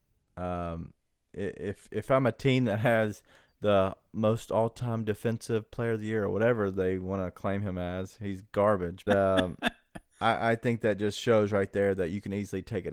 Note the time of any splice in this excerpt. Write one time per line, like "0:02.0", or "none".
0:09.1